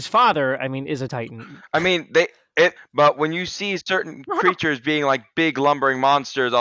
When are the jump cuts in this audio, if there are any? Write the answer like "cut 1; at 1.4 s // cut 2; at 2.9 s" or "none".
cut 1; at 2.8 s